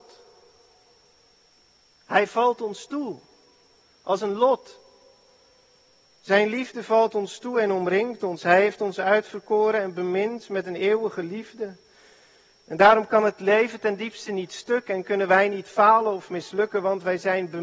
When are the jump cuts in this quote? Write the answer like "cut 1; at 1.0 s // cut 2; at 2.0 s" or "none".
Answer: none